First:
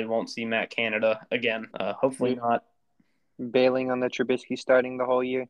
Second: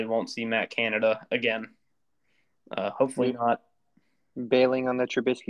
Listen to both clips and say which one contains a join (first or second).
first